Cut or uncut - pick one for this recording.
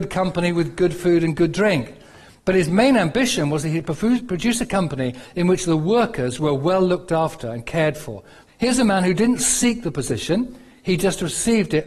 cut